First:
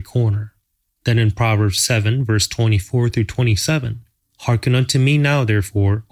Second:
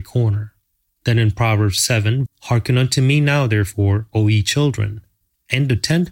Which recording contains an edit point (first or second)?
second